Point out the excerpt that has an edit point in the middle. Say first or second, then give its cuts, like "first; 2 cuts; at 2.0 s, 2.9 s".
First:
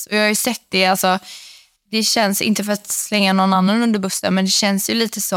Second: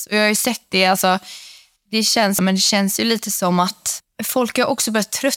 second; 1 cut; at 2.4 s